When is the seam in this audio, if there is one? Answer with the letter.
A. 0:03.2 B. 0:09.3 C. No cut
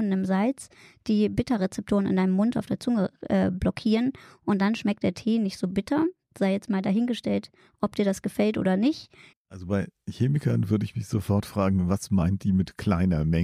B